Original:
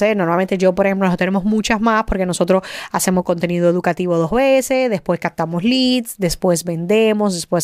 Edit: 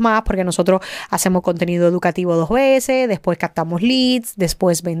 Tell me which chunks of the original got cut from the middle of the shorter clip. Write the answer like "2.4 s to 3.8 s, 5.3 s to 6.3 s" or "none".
none

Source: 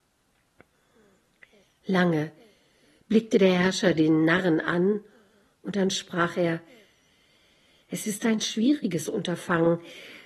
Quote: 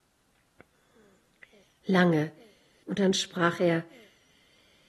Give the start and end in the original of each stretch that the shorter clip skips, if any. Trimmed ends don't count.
2.8 s to 5.6 s

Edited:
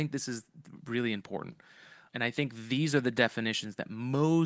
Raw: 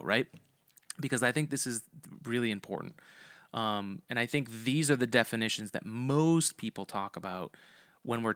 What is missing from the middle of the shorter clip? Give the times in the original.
3.5 s to 4.1 s

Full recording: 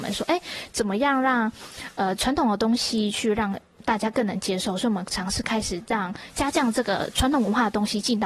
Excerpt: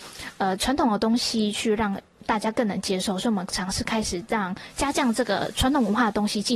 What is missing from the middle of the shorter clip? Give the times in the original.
none

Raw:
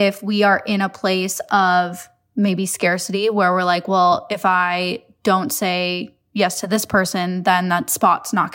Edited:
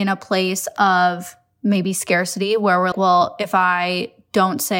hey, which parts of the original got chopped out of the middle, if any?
3.6 s to 3.8 s

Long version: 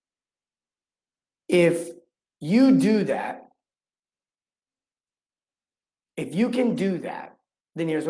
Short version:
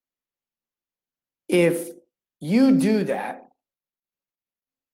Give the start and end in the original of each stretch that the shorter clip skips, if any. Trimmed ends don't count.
none

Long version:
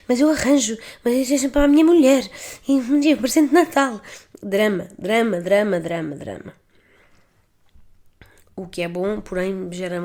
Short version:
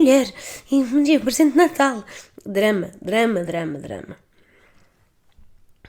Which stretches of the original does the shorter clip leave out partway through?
5.4 s to 5.8 s

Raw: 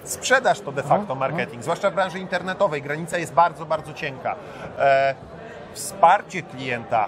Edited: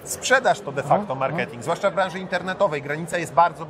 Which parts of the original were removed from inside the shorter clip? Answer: none

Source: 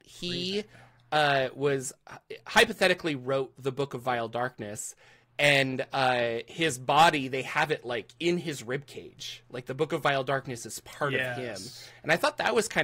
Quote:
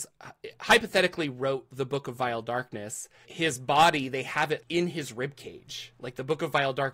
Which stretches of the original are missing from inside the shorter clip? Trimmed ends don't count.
5.1 s to 6.4 s, 7.8 s to 8.1 s

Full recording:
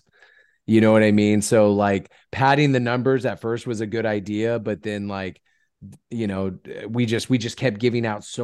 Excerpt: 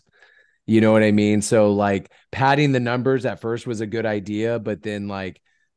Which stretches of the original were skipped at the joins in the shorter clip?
none

